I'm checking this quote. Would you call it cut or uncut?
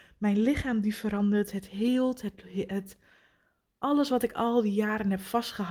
uncut